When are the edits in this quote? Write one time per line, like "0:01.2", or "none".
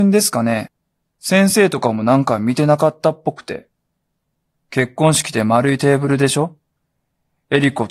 0:01.1
0:04.6